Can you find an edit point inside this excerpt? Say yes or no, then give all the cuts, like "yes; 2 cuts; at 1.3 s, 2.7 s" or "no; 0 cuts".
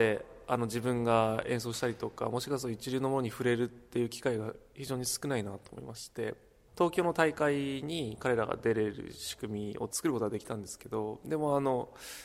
no; 0 cuts